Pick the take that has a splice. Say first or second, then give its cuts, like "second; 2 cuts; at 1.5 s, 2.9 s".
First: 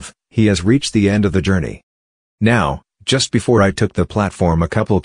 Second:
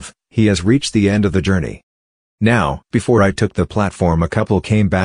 second; 1 cut; at 2.9 s